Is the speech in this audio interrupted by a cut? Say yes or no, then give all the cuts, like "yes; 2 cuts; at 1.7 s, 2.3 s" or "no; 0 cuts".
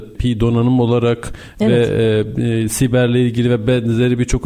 no; 0 cuts